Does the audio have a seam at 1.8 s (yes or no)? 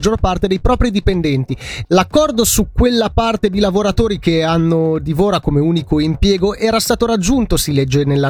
yes